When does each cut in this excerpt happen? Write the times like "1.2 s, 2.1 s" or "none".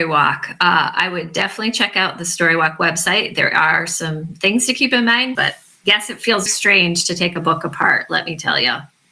5.4 s, 6.5 s